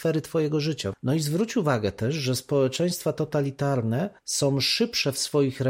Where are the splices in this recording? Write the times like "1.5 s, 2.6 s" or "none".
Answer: 0.9 s, 4.2 s